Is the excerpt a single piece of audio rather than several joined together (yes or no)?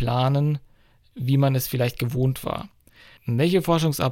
no